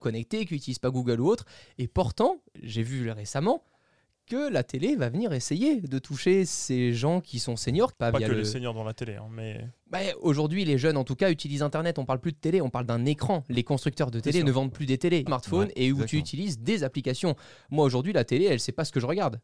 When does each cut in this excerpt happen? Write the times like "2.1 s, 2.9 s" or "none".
7.9 s, 15.3 s